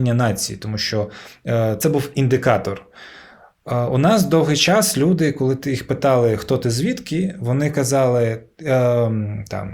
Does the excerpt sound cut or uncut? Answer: uncut